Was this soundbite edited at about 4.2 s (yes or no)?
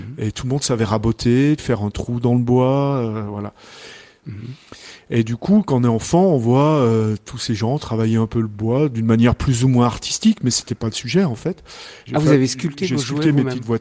yes